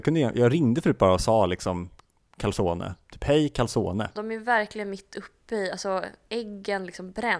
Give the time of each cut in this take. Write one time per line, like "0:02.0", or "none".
0:04.2